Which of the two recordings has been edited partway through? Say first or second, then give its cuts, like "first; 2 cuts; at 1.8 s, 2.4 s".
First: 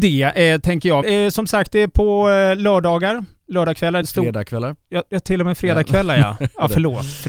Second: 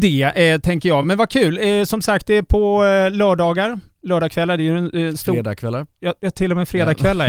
first; 2 cuts; at 1.0 s, 4.0 s